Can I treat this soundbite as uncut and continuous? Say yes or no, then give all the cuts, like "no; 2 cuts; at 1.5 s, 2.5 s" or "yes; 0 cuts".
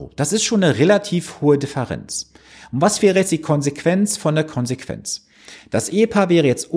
yes; 0 cuts